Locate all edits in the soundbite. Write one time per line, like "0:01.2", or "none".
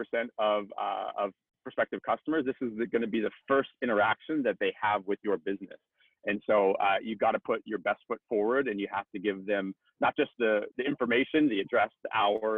0:10.7